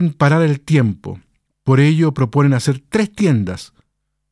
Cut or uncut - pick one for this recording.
uncut